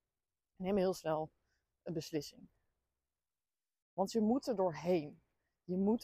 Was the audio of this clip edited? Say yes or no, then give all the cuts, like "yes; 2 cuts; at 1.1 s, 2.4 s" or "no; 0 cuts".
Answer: no; 0 cuts